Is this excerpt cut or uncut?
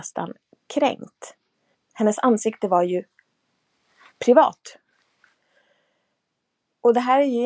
cut